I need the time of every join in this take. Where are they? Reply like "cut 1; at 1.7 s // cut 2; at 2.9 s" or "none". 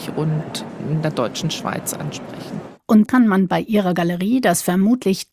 cut 1; at 3.1 s